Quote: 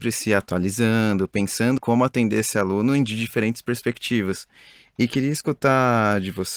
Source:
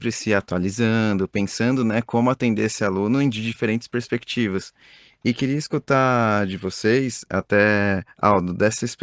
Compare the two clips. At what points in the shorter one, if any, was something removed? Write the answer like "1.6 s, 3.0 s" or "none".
1.8 s